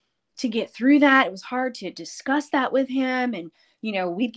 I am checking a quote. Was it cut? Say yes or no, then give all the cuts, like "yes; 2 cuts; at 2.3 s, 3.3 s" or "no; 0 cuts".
no; 0 cuts